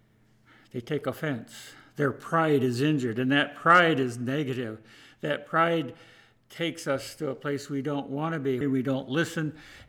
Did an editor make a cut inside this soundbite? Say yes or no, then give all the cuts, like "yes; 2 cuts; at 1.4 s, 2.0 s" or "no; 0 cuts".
yes; 1 cut; at 8.6 s